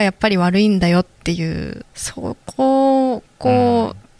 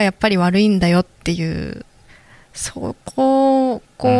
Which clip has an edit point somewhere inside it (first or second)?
first